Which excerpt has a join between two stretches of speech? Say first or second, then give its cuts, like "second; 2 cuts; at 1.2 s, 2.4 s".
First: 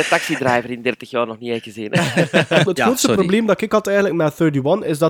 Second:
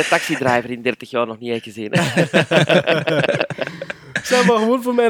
first; 1 cut; at 2.7 s